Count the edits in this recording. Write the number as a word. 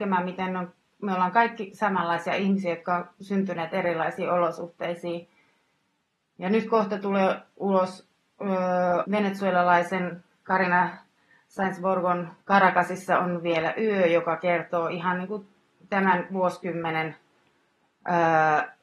two